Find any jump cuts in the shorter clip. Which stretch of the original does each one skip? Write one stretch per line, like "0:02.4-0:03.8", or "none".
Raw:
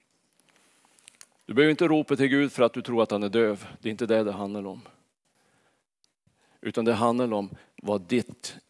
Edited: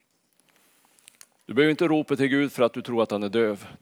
none